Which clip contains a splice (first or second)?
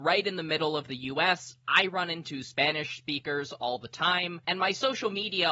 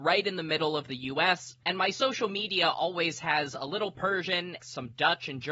second